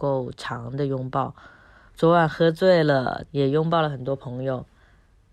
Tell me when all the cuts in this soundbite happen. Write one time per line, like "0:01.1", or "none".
0:01.9
0:03.3